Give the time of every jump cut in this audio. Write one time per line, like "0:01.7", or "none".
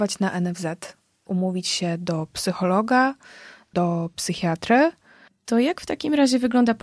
0:05.3